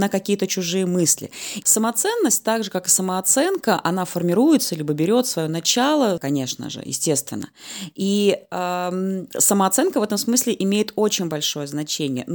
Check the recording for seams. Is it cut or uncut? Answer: cut